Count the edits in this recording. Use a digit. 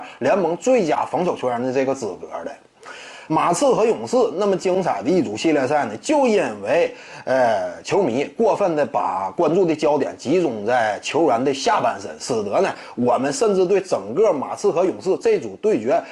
1